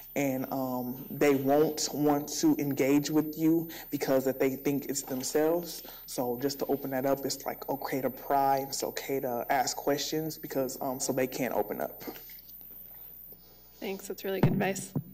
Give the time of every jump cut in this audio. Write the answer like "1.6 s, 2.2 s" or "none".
11.0 s